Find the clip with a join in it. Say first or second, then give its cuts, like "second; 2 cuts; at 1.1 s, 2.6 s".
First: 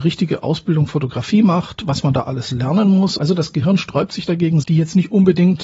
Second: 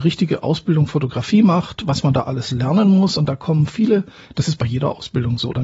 first; 2 cuts; at 3.2 s, 4.6 s